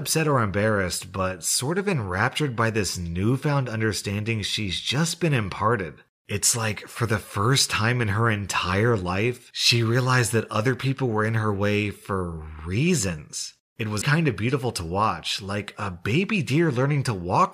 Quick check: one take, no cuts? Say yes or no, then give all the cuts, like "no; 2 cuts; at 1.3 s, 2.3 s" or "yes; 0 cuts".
no; 1 cut; at 14.0 s